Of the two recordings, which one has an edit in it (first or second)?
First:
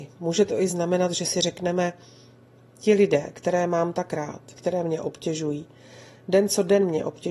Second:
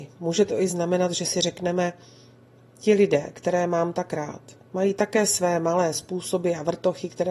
first